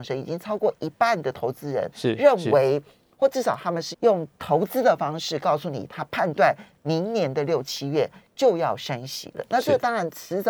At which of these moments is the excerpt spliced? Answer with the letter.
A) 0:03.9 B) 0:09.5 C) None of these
A